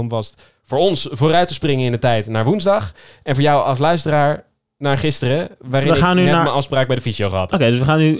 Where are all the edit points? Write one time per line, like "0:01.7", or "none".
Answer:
none